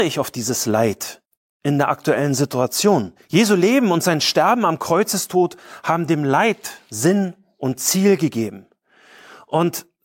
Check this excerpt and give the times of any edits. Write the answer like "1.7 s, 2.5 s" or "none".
none